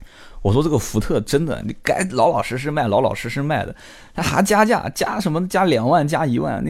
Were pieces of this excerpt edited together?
yes; 1 cut; at 1.6 s

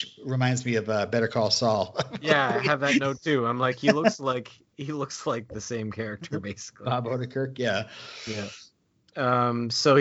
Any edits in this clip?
no; 0 cuts

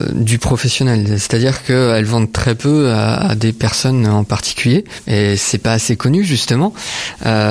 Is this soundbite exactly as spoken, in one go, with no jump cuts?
no; 1 cut; at 5.0 s

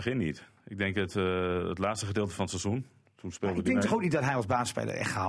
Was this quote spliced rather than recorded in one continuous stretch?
no; 0 cuts

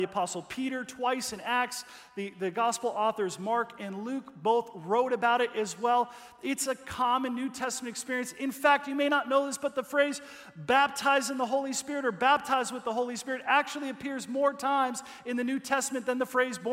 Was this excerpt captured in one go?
yes; 0 cuts

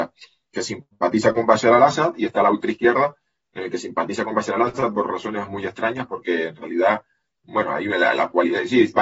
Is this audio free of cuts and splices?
yes; 0 cuts

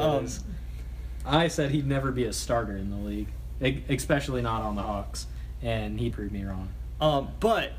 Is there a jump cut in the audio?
yes; 1 cut; at 6.1 s

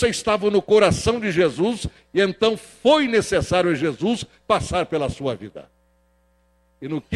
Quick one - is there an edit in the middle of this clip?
no; 0 cuts

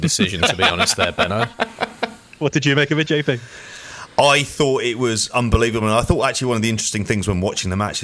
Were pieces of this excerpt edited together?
no; 0 cuts

